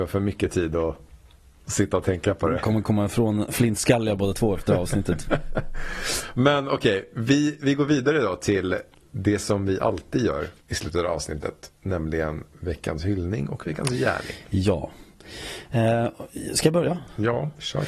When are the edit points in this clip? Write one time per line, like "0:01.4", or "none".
none